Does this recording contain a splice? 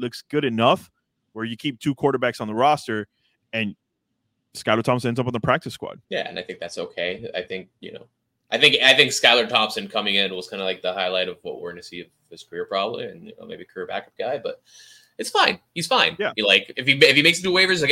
yes; 1 cut; at 6.0 s

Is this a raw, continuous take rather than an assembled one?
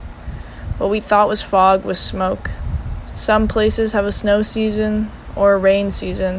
no; 1 cut; at 3.1 s

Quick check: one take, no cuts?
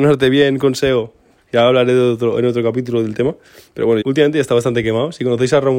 no; 1 cut; at 4.0 s

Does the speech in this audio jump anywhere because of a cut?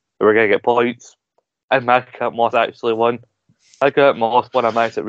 no; 0 cuts

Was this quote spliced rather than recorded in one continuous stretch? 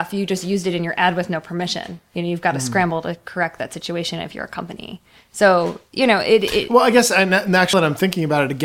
yes; 1 cut; at 7.7 s

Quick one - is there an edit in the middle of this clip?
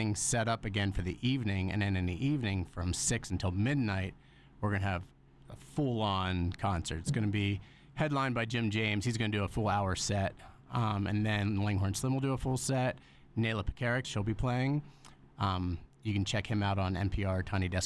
yes; 2 cuts; at 14.0 s, 15.3 s

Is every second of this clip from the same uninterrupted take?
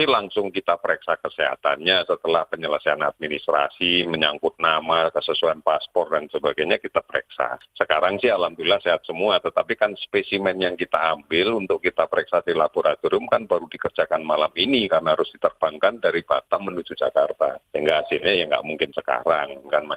yes; 0 cuts

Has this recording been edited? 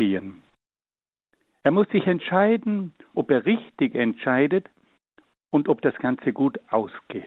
yes; 1 cut; at 3.1 s

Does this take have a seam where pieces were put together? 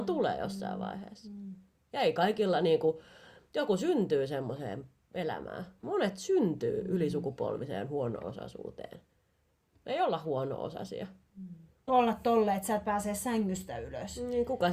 yes; 2 cuts; at 5.8 s, 11.9 s

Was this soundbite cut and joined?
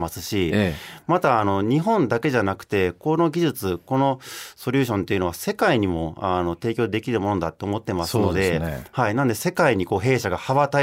no; 0 cuts

